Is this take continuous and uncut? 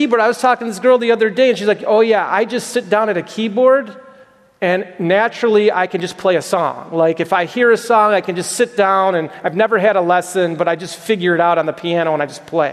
yes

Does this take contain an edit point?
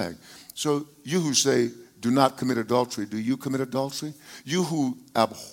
no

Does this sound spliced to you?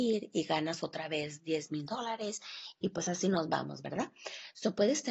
no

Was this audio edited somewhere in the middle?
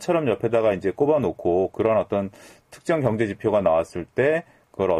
no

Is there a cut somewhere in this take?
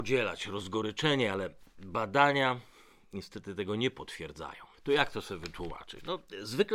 yes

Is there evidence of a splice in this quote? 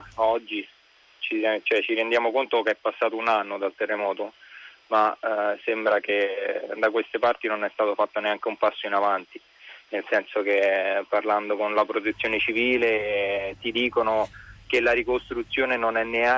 no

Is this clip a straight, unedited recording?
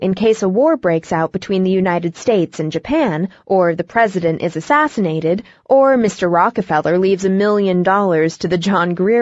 yes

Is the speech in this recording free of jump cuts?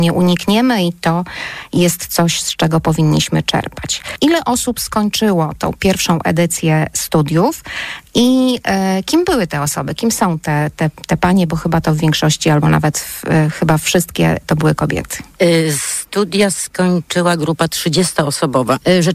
yes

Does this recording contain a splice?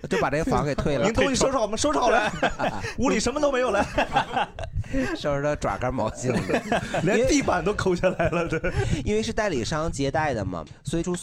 no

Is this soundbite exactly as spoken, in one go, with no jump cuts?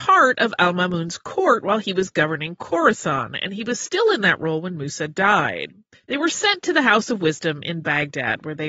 no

